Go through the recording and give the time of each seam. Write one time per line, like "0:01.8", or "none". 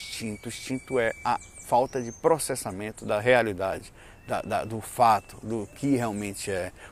none